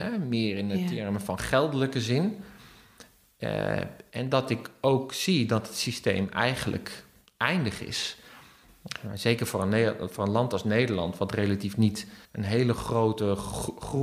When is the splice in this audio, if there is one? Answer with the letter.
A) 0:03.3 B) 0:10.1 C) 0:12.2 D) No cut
C